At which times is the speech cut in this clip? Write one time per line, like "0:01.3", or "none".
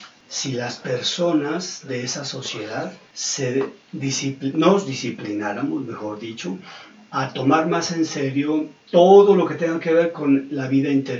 none